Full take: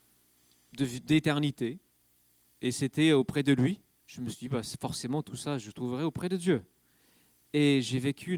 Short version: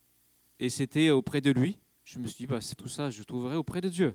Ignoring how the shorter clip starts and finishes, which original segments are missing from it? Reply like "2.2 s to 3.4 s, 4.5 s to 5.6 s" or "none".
4.8 s to 5.2 s